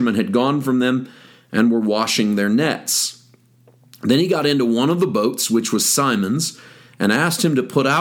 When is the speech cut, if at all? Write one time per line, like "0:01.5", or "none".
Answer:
none